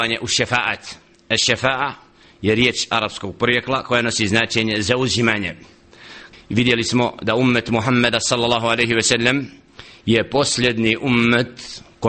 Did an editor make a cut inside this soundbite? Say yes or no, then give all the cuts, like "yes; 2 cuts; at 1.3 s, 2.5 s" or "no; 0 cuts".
yes; 1 cut; at 6.3 s